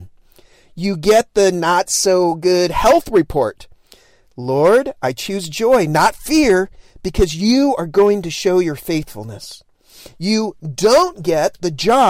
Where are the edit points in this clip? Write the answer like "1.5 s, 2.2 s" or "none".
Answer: none